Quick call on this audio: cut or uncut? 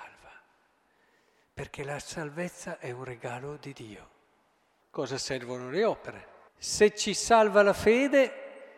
cut